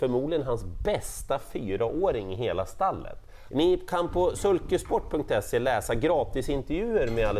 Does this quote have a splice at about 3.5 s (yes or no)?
yes